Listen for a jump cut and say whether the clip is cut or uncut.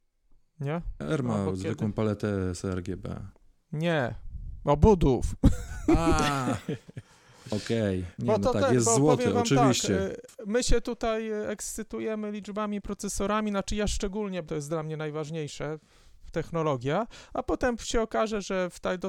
cut